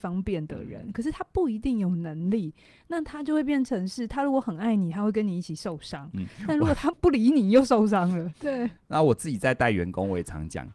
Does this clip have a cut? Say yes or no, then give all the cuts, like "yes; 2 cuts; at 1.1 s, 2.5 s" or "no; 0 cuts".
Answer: yes; 2 cuts; at 6.9 s, 8.3 s